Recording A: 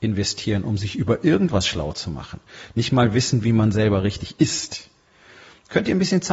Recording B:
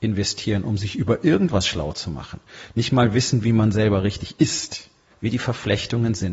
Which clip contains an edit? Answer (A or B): B